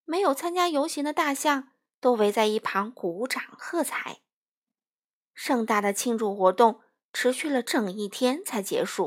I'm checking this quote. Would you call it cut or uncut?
cut